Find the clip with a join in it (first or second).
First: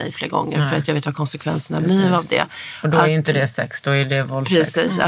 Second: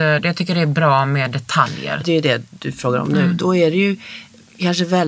second